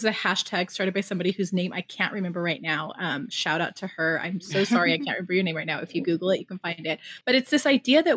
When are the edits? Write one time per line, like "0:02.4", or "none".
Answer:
0:07.2